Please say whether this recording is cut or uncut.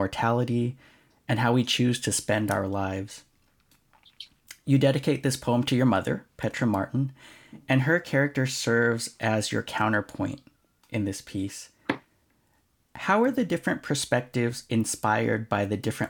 uncut